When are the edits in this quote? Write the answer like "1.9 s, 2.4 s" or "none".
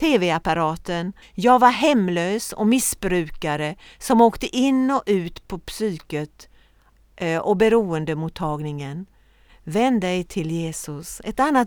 1.2 s, 9.5 s